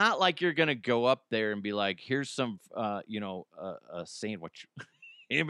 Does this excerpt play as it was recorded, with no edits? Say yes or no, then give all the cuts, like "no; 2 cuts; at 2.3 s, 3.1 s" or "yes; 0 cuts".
yes; 0 cuts